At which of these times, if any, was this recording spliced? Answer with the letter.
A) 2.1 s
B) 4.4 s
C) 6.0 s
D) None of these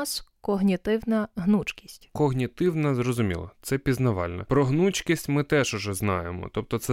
A